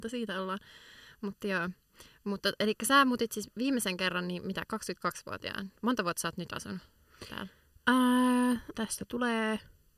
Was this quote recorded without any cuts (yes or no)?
no